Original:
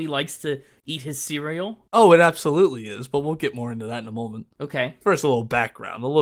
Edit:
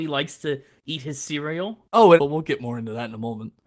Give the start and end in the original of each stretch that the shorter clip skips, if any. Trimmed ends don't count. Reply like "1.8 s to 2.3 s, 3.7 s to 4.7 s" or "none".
2.2 s to 3.1 s